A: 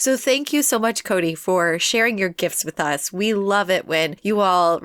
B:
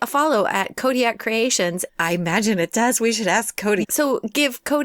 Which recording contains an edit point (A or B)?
B